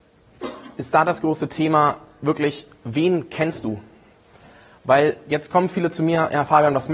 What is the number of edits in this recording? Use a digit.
0